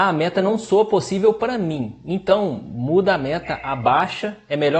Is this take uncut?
yes; 0 cuts

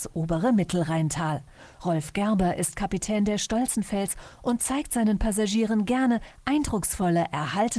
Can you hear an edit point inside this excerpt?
no; 0 cuts

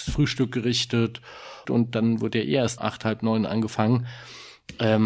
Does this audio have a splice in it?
yes; 2 cuts; at 1.6 s, 2.8 s

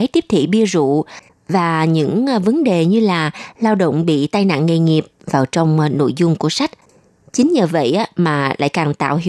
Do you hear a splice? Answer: no; 0 cuts

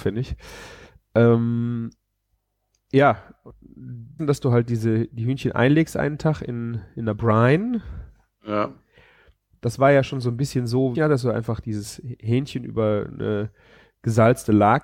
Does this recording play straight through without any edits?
no; 2 cuts; at 4.2 s, 10.9 s

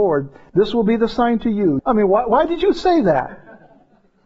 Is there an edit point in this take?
yes; 1 cut; at 1.8 s

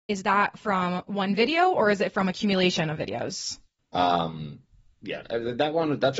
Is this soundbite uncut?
no; 1 cut; at 3.8 s

